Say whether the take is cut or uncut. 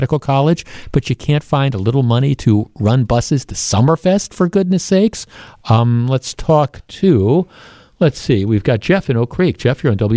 uncut